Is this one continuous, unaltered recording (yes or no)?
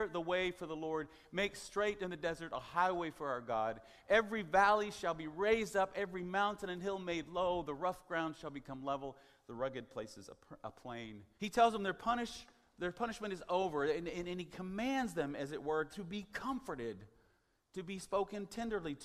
no